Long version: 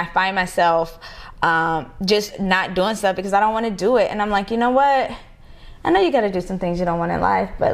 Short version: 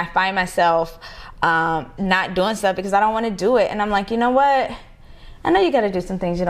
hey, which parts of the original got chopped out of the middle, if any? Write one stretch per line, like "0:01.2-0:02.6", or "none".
0:02.0-0:02.4